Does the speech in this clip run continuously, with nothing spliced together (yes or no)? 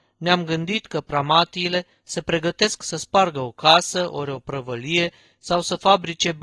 yes